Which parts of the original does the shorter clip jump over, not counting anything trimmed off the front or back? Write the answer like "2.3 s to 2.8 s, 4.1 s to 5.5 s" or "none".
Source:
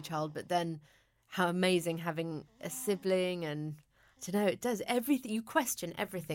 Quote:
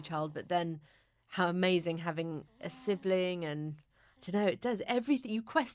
none